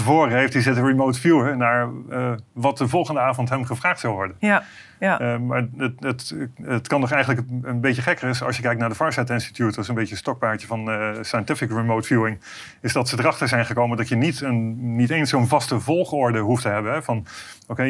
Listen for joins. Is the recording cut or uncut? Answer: uncut